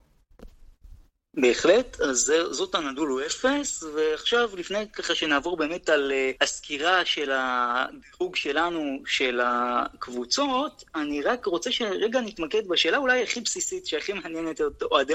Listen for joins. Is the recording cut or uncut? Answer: cut